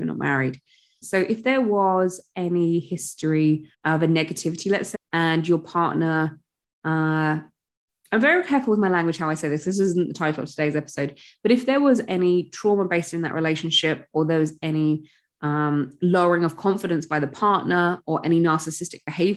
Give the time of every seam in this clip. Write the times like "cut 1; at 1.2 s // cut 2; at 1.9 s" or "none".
cut 1; at 1.0 s // cut 2; at 3.7 s // cut 3; at 4.9 s